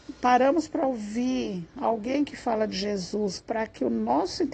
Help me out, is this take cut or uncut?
cut